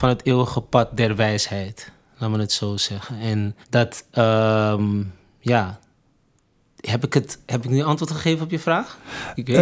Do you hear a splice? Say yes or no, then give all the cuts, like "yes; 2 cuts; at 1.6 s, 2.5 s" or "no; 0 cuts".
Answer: yes; 1 cut; at 3.6 s